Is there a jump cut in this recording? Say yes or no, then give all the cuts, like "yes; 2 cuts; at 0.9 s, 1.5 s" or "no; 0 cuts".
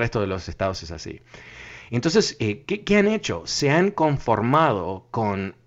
no; 0 cuts